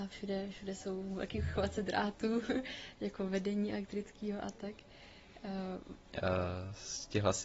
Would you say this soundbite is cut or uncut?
cut